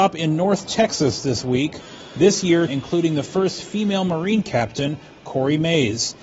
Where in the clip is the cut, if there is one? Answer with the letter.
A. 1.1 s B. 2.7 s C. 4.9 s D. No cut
B